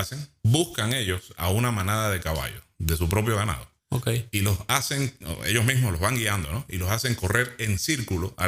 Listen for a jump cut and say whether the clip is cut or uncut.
cut